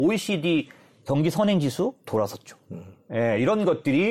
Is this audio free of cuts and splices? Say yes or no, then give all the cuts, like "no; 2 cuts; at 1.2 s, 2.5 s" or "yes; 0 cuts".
yes; 0 cuts